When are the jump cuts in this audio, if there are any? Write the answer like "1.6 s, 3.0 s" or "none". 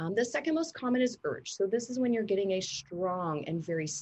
none